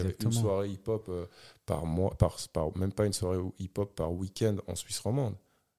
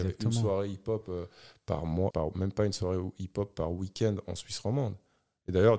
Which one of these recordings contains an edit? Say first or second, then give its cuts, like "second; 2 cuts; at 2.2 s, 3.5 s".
second; 1 cut; at 2.1 s